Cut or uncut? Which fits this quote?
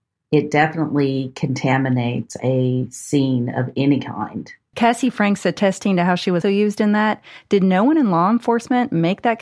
cut